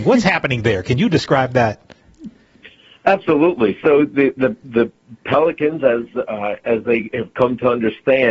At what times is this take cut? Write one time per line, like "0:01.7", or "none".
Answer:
none